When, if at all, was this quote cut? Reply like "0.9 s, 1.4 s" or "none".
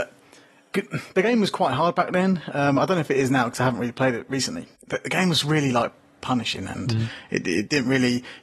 4.8 s